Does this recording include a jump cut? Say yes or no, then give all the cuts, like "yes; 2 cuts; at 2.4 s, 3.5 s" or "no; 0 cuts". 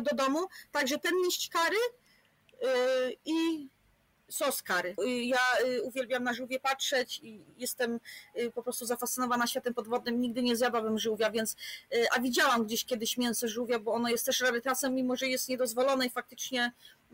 yes; 1 cut; at 5.0 s